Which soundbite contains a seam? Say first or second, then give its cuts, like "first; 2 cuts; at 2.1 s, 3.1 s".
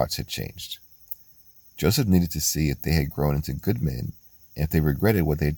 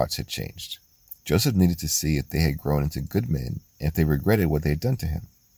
second; 2 cuts; at 1.2 s, 3.7 s